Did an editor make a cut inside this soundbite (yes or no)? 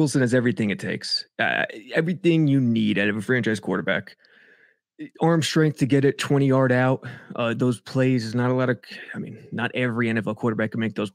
no